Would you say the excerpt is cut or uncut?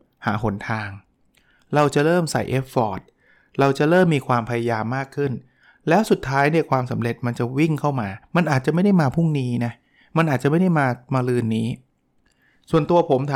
uncut